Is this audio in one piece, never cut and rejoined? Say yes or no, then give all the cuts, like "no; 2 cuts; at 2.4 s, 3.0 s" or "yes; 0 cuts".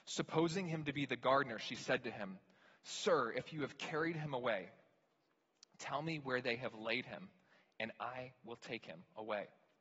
yes; 0 cuts